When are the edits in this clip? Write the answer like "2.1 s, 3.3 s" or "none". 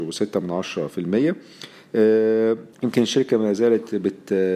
2.7 s